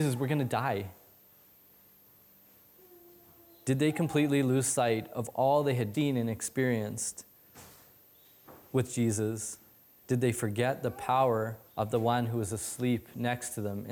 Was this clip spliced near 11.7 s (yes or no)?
yes